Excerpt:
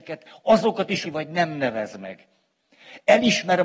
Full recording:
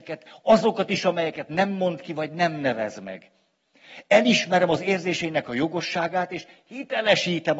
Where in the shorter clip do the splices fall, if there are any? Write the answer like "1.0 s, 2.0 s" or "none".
1.0 s